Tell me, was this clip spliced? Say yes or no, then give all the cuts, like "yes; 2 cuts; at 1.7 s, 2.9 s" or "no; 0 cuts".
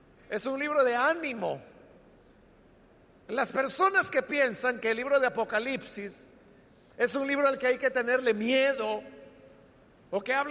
no; 0 cuts